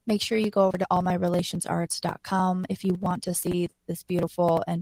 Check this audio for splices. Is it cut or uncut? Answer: uncut